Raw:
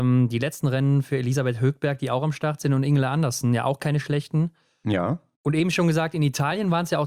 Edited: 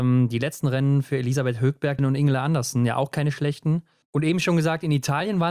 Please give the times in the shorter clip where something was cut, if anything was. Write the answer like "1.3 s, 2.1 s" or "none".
2.0 s, 4.0 s